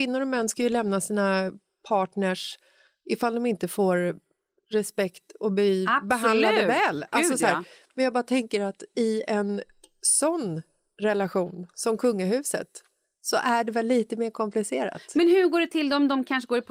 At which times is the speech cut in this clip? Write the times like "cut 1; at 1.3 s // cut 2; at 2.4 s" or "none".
none